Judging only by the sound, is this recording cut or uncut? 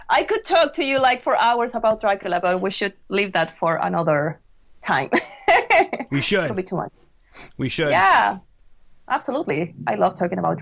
uncut